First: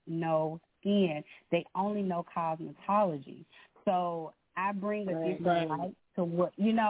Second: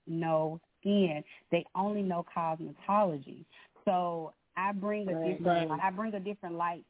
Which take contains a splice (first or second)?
second